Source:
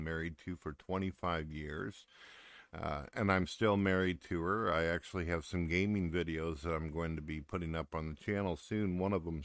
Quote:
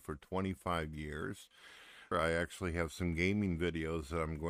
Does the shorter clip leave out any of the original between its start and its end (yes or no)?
yes